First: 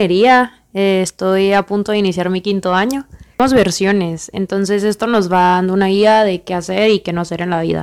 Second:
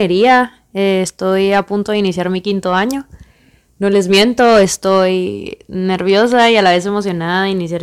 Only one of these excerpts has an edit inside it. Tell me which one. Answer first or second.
first